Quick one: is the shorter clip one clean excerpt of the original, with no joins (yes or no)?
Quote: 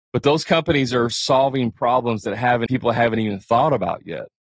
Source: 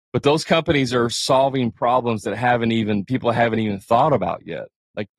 no